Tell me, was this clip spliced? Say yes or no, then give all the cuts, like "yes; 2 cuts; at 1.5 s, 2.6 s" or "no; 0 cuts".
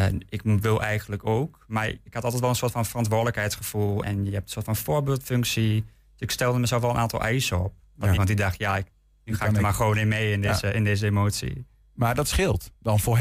yes; 2 cuts; at 4.0 s, 8.2 s